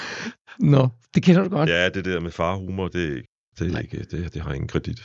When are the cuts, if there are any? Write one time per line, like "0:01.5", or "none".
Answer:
0:02.9